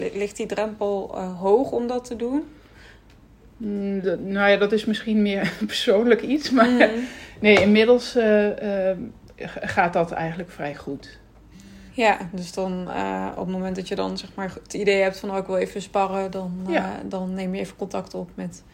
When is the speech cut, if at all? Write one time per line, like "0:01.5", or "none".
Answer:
none